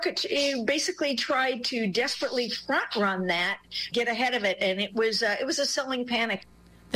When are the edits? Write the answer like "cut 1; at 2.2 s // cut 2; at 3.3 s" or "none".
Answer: cut 1; at 3.9 s